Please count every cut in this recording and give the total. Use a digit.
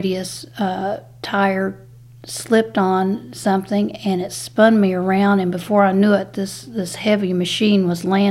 0